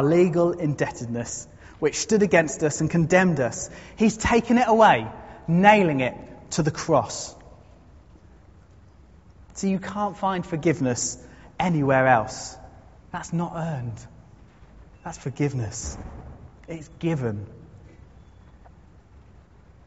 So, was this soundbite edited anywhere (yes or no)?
yes